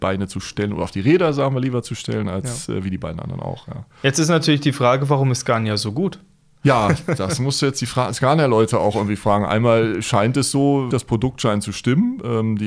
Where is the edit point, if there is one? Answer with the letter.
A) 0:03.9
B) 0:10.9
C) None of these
B